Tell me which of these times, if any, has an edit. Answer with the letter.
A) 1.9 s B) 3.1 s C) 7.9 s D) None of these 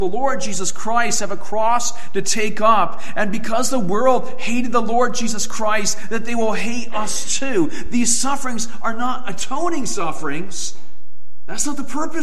D